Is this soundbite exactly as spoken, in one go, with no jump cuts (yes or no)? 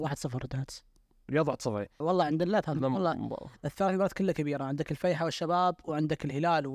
no